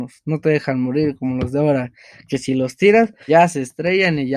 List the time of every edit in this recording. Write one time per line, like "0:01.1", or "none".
0:03.3